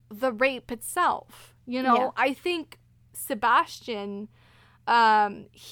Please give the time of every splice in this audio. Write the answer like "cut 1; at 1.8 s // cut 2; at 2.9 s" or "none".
none